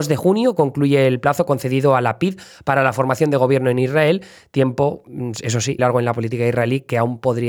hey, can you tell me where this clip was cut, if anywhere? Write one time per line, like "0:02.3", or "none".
0:05.8